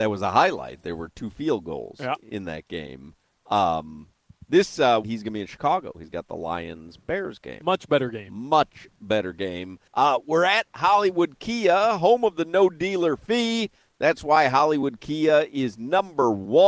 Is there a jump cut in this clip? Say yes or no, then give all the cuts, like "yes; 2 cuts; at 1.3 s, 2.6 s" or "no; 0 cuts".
yes; 2 cuts; at 5.0 s, 9.9 s